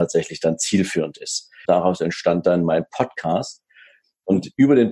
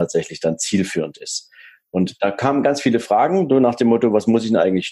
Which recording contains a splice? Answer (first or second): first